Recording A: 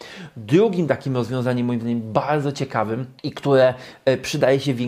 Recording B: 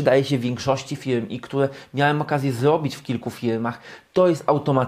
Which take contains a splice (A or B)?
A